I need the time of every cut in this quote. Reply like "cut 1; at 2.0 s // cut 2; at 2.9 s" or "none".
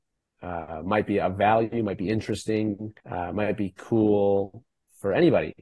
cut 1; at 3.0 s